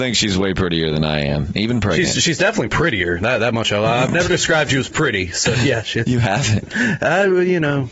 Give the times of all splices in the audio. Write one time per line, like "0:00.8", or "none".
none